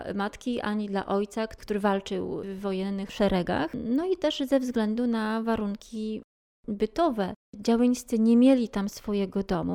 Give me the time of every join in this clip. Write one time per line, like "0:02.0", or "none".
0:07.4